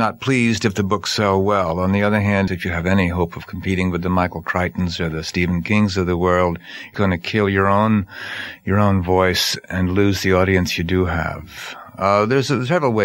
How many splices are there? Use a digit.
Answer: 2